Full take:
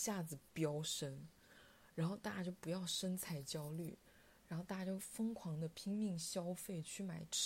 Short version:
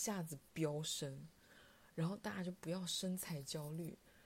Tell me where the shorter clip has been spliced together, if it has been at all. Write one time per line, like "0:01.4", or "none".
none